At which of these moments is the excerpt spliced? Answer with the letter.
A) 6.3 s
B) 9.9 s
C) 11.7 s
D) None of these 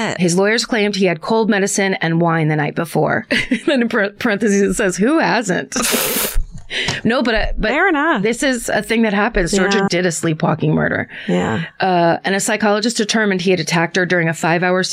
B